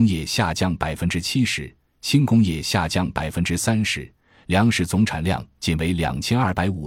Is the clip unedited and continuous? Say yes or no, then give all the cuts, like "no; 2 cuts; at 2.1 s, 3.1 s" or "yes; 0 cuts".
yes; 0 cuts